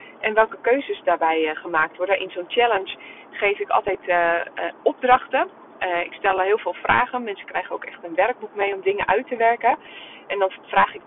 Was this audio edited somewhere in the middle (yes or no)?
no